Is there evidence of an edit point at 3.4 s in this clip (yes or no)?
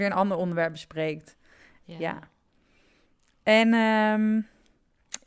no